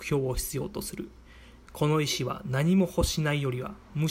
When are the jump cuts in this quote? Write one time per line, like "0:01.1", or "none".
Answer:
none